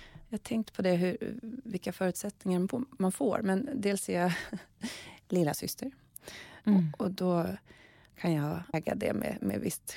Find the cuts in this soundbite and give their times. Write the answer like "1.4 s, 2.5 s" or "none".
6.6 s, 8.7 s